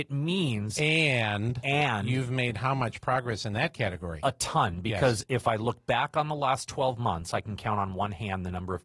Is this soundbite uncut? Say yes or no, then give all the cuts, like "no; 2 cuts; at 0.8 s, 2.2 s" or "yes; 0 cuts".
yes; 0 cuts